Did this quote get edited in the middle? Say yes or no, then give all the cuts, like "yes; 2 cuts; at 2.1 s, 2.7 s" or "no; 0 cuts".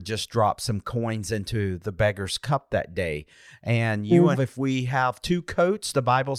yes; 1 cut; at 4.3 s